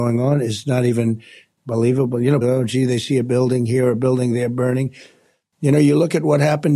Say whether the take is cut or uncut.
cut